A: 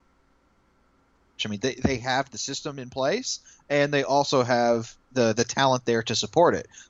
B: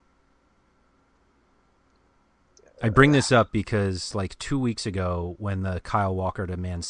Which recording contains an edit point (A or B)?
A